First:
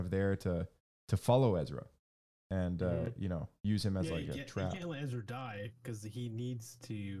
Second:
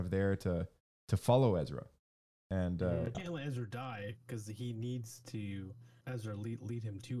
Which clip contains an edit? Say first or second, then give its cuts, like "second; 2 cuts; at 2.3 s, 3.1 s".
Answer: second; 2 cuts; at 3.1 s, 6.0 s